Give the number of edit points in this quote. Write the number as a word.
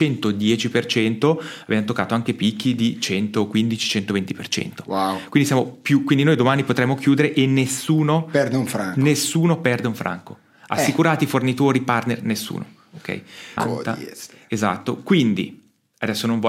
one